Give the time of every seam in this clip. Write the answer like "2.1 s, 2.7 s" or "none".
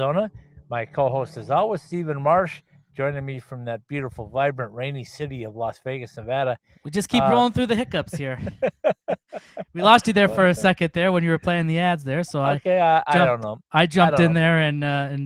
none